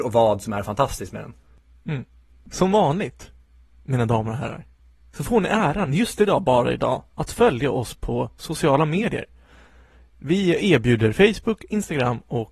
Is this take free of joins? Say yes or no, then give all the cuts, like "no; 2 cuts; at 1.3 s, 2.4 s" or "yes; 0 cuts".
yes; 0 cuts